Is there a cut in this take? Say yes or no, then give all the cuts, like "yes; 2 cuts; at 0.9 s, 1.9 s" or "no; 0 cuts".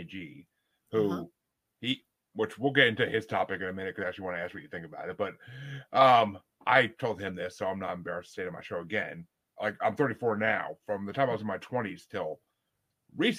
yes; 1 cut; at 9.5 s